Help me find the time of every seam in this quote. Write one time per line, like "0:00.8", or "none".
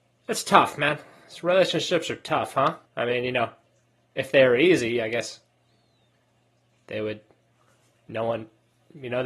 0:02.9